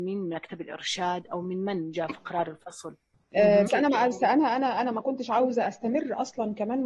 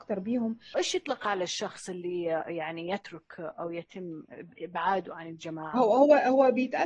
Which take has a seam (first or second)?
first